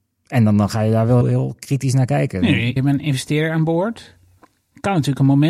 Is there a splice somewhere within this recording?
yes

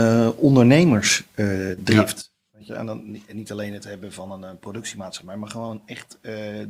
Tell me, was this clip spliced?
no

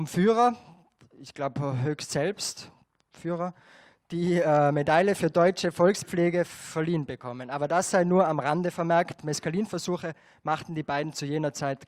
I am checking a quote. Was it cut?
no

